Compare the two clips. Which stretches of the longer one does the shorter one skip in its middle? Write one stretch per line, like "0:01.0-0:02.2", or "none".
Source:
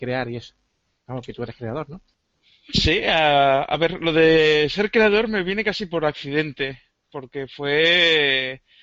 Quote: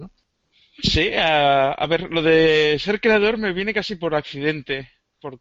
none